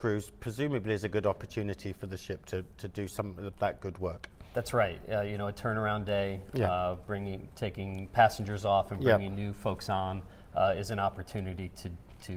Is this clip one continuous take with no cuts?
yes; 0 cuts

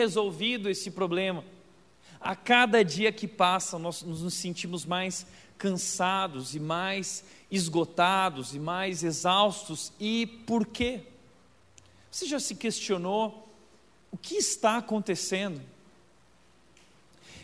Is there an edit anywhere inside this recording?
no; 0 cuts

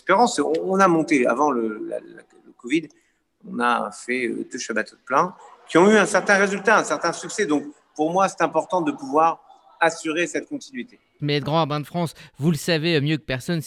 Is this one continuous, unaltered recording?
no; 1 cut; at 11.2 s

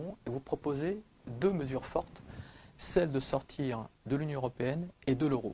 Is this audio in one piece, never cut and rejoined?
no; 1 cut; at 3.9 s

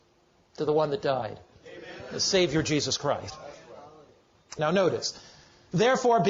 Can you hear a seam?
yes; 2 cuts; at 1.5 s, 4.6 s

